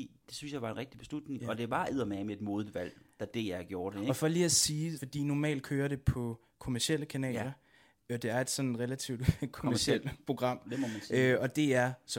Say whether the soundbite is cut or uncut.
cut